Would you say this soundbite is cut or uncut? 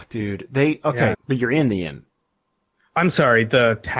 cut